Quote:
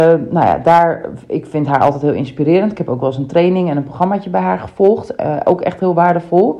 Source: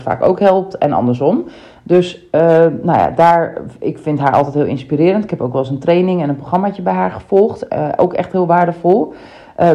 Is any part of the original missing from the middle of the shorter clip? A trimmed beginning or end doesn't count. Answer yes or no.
no